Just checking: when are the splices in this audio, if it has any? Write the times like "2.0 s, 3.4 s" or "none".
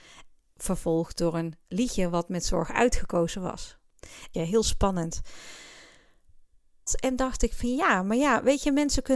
4.3 s, 6.9 s

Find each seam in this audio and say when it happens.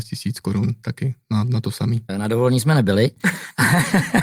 2.1 s

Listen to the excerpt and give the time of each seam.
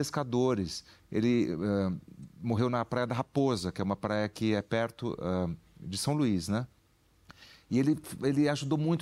none

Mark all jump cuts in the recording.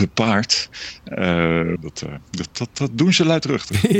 1.8 s

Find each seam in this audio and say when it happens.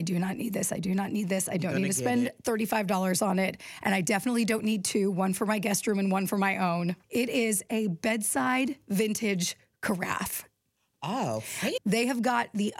7.0 s, 11.8 s

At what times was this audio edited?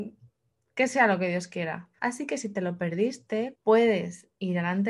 2.0 s, 3.5 s

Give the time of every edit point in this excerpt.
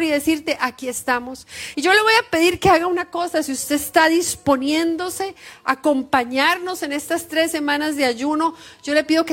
1.7 s

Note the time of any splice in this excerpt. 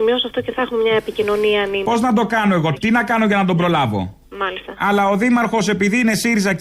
2.8 s, 4.3 s

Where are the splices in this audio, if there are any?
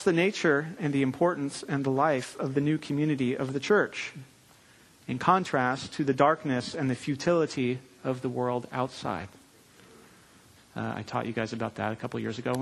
10.6 s

